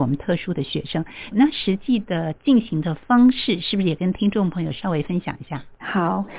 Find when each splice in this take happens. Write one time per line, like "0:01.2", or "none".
0:01.3